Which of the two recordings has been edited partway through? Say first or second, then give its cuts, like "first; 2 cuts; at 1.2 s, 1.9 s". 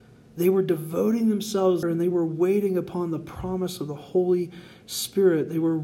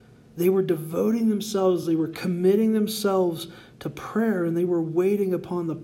first; 1 cut; at 1.8 s